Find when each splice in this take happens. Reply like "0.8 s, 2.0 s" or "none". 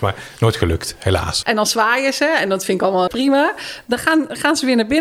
1.4 s, 3.1 s